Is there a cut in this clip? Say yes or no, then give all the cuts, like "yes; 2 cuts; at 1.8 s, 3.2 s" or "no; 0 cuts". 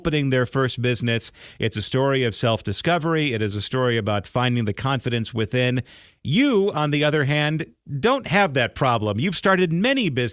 no; 0 cuts